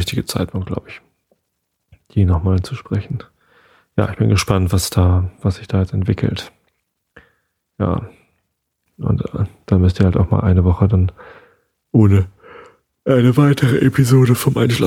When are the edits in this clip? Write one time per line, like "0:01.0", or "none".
0:08.9